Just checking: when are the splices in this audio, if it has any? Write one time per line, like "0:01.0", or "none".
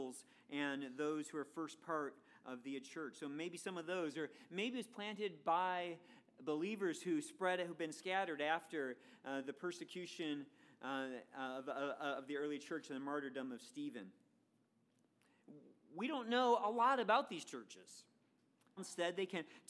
0:18.8